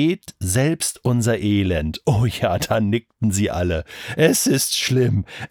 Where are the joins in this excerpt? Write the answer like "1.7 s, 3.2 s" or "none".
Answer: none